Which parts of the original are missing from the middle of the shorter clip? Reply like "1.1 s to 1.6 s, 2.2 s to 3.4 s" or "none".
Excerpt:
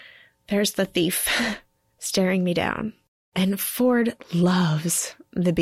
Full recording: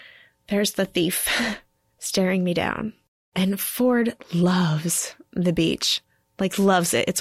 none